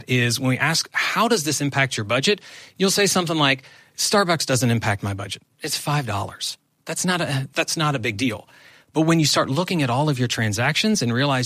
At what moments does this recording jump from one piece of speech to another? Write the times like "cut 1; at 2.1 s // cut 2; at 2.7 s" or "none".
cut 1; at 7.5 s